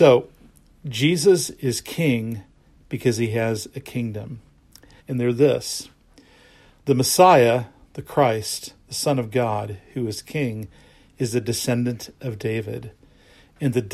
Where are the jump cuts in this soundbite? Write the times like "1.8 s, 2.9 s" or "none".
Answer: 5.0 s